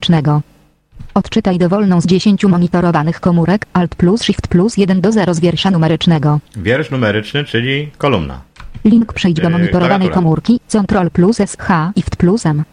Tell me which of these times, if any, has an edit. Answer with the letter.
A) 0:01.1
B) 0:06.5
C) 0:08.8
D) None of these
B